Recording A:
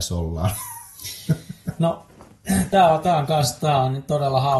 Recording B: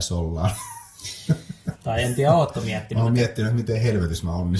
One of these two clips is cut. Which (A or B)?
B